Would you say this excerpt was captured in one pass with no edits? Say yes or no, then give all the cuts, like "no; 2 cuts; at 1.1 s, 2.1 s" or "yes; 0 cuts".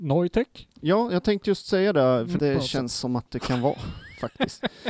no; 1 cut; at 2.4 s